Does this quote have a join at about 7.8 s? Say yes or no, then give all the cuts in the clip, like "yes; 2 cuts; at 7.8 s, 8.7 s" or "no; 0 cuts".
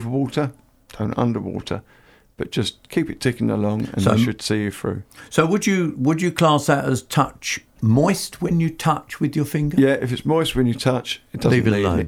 yes; 1 cut; at 7.8 s